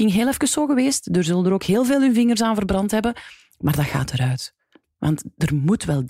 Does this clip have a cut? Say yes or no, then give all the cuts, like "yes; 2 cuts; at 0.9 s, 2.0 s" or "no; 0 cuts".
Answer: no; 0 cuts